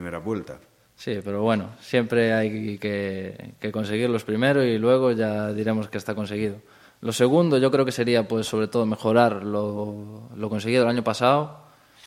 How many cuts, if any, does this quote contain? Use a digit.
0